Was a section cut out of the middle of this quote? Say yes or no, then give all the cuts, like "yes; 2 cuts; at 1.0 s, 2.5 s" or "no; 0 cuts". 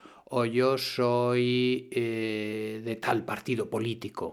no; 0 cuts